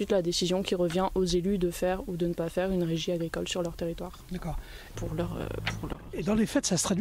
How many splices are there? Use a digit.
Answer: 1